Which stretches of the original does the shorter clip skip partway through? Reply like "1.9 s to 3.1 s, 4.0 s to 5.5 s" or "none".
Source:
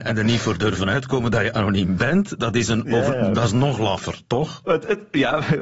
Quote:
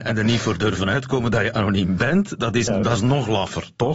2.7 s to 3.2 s